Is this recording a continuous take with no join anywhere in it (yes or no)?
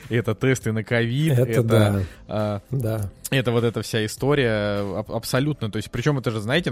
yes